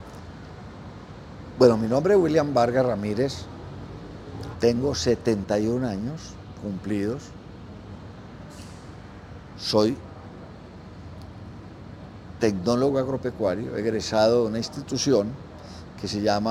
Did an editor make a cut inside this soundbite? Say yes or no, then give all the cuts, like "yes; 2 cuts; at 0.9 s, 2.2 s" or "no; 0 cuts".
yes; 2 cuts; at 4.5 s, 9.5 s